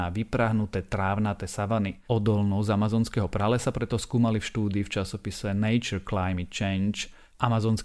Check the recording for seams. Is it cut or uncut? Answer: cut